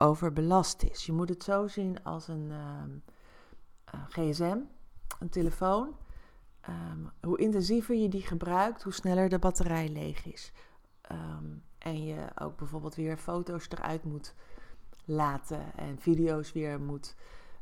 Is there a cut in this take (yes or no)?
yes